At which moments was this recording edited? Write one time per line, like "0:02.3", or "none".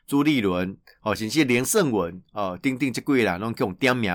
none